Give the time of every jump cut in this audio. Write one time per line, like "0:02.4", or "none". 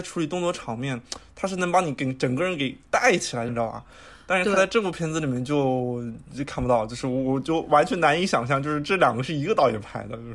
0:03.5